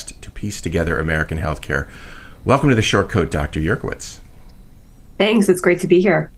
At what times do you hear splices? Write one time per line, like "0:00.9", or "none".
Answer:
none